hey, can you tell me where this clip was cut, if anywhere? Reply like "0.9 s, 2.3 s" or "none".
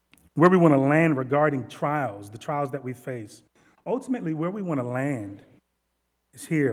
none

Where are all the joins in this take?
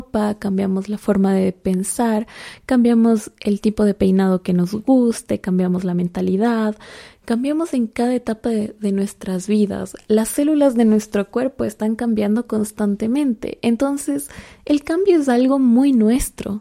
none

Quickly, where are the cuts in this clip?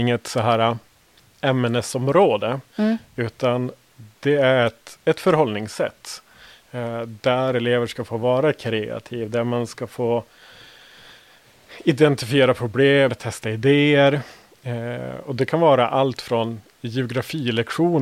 13.1 s

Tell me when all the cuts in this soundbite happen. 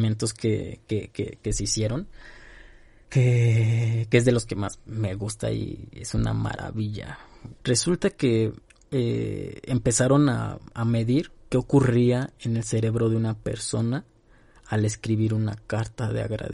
7.6 s

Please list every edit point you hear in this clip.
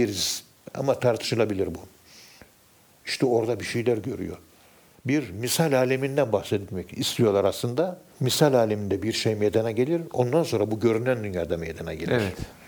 4.9 s, 8.1 s

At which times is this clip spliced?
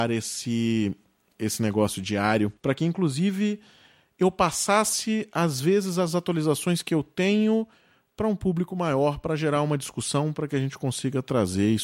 2.6 s

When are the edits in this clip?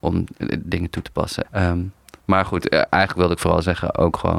1.4 s

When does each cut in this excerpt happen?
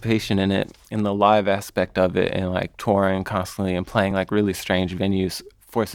none

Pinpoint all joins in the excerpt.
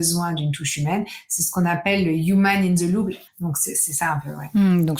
3.3 s

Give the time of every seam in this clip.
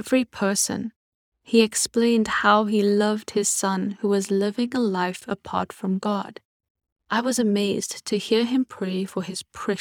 1.3 s, 7.0 s

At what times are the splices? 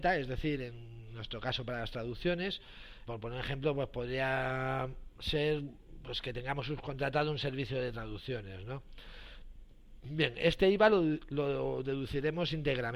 3.1 s

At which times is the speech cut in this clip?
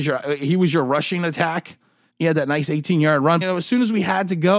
2.1 s, 3.4 s

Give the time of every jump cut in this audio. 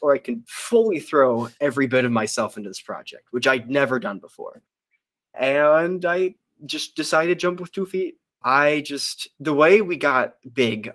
8.3 s, 9.3 s

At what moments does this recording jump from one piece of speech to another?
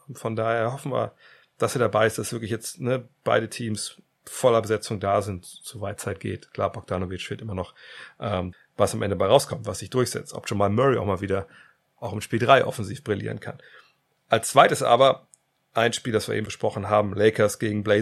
8.5 s, 16.5 s

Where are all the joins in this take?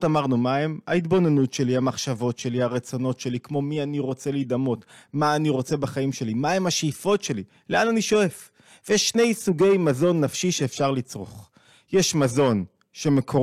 none

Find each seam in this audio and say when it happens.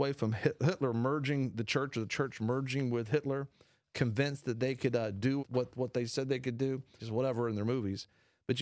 5.4 s, 7.0 s

